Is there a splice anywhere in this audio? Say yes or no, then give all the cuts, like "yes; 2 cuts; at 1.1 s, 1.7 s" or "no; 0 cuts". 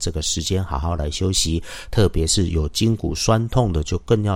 no; 0 cuts